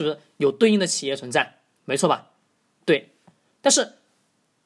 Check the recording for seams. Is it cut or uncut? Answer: uncut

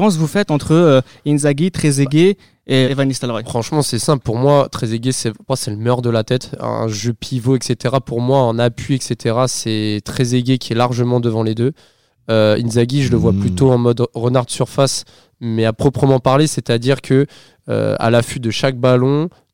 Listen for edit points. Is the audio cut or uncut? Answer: cut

